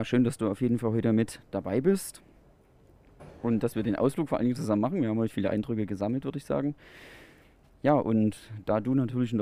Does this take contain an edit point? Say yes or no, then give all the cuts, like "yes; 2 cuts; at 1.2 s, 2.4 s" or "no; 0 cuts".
no; 0 cuts